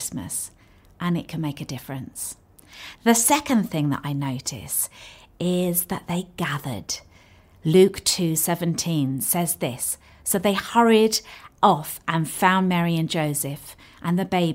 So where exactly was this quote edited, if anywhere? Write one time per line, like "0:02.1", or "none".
none